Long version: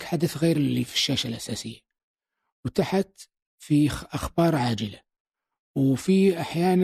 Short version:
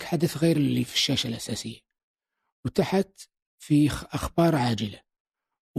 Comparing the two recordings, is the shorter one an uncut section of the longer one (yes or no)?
yes